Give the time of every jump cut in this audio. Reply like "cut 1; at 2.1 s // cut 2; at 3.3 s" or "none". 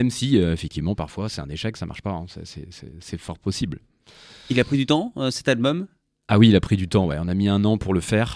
none

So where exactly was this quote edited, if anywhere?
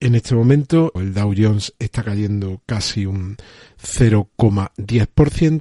cut 1; at 1.0 s

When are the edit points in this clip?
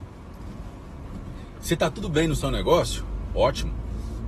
none

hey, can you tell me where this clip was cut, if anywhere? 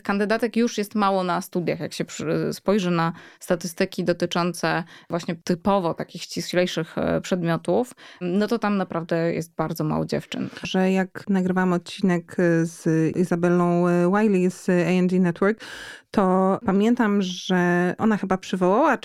cut 1; at 10.6 s

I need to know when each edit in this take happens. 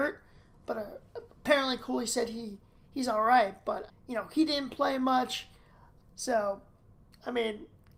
cut 1; at 3.9 s // cut 2; at 6.0 s

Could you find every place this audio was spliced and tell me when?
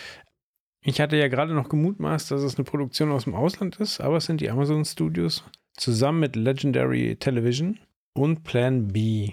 none

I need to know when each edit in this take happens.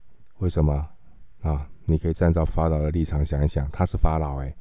cut 1; at 2.5 s

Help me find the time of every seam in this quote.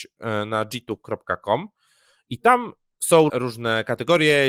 cut 1; at 3.3 s

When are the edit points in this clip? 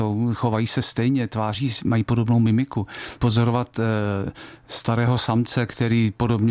cut 1; at 3.2 s

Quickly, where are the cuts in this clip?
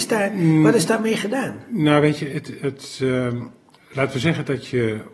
cut 1; at 3.7 s

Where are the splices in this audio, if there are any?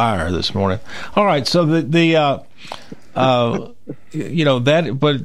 none

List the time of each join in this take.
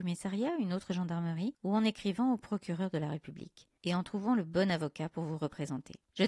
none

